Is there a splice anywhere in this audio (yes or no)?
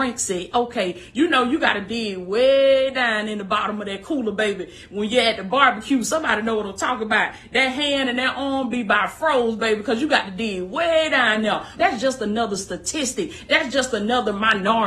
yes